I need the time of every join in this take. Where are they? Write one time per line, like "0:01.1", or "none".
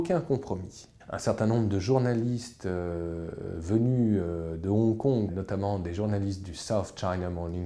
0:01.0
0:05.3